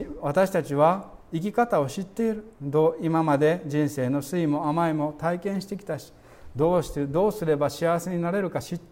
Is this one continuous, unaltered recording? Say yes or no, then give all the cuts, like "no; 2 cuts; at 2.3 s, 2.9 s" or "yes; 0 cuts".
no; 1 cut; at 2.5 s